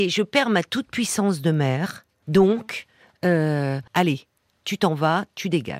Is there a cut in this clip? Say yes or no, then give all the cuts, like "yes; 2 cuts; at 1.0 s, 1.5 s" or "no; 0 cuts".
yes; 2 cuts; at 2.2 s, 3.9 s